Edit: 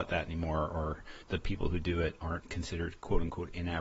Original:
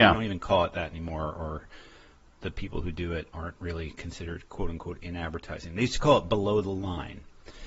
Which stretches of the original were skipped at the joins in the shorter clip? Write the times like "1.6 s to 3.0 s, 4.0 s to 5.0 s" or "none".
1.9 s to 2.3 s, 3.6 s to 3.9 s